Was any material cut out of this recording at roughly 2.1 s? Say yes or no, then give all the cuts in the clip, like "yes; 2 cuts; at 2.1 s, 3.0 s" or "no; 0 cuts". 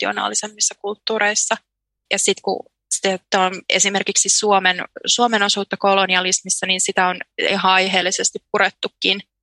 yes; 1 cut; at 2.1 s